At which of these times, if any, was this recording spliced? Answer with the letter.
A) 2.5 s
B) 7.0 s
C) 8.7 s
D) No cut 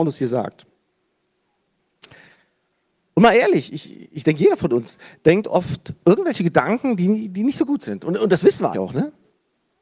C